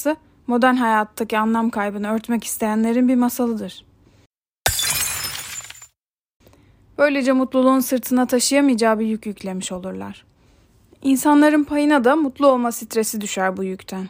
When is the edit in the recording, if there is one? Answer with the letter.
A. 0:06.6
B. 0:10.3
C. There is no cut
C